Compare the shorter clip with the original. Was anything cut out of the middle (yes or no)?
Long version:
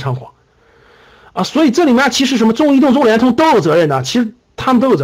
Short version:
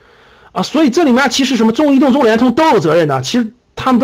no